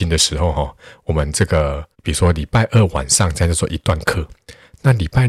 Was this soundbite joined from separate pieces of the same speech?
yes; 1 cut; at 1.9 s

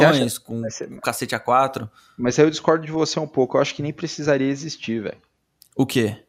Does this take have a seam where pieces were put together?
no; 0 cuts

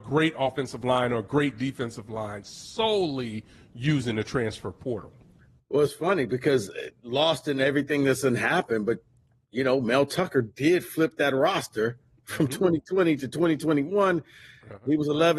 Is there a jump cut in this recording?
no; 0 cuts

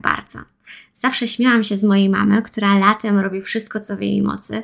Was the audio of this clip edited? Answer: no; 0 cuts

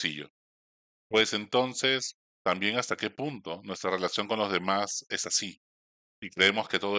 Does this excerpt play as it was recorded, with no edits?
yes; 0 cuts

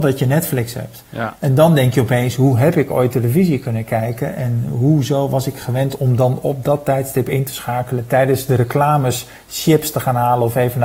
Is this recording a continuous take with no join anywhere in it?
yes; 0 cuts

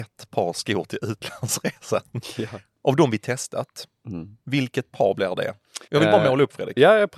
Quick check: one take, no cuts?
no; 1 cut; at 5.9 s

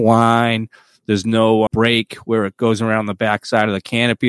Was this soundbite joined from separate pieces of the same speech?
yes; 1 cut; at 1.7 s

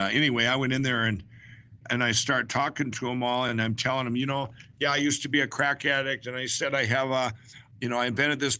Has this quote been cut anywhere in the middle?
no; 0 cuts

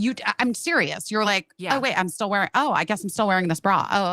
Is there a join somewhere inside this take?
no; 0 cuts

